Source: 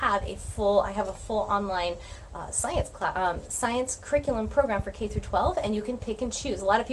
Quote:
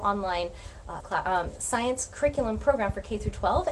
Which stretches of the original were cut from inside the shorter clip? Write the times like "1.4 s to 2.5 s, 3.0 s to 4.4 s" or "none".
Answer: 2.5 s to 2.9 s